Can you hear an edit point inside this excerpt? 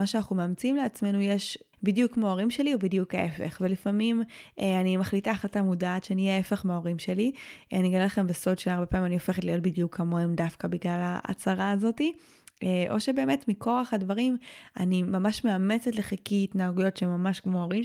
yes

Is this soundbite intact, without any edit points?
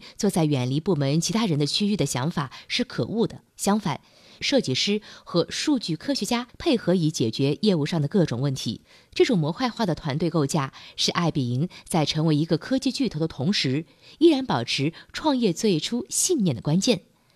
no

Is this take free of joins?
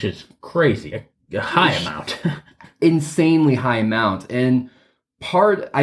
yes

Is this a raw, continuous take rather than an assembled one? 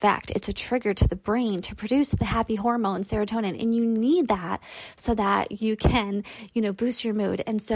yes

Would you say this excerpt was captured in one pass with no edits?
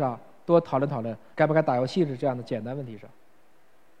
no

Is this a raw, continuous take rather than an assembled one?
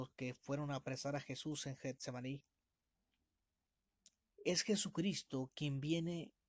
no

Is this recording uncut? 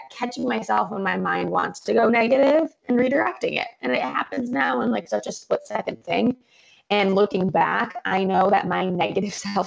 yes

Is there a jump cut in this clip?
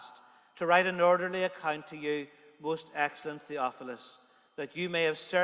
no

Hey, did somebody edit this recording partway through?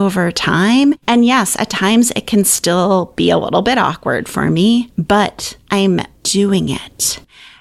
no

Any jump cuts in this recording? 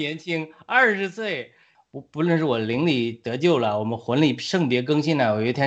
yes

